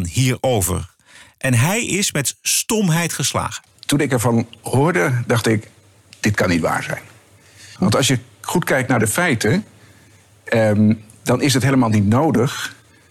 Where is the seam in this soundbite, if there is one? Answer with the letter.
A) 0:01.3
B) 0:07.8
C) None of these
B